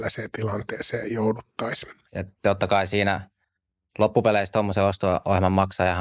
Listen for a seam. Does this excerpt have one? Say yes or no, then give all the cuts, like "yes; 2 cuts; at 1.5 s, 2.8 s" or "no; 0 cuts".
yes; 1 cut; at 2.1 s